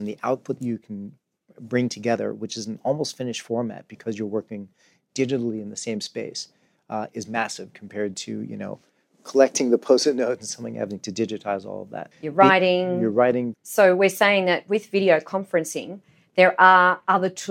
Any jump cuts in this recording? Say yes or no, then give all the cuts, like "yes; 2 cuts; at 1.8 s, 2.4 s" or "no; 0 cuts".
yes; 2 cuts; at 12.1 s, 13.5 s